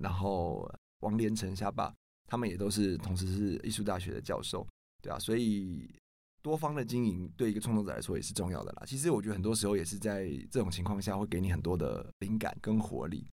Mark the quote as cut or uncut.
uncut